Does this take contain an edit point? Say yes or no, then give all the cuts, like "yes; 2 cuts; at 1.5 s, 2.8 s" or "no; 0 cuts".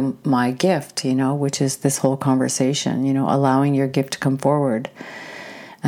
no; 0 cuts